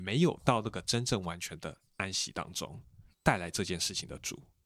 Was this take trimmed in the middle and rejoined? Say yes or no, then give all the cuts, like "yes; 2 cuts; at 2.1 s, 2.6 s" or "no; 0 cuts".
yes; 1 cut; at 3.1 s